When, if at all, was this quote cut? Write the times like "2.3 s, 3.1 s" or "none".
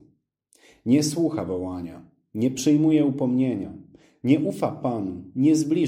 none